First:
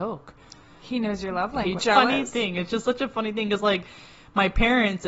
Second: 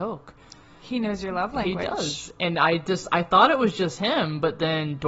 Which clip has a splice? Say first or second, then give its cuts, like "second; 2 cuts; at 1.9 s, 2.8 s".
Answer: first; 1 cut; at 1.8 s